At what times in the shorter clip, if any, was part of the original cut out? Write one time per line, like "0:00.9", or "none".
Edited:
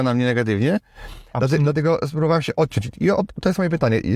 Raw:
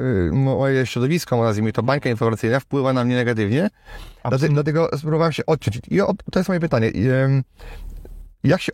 none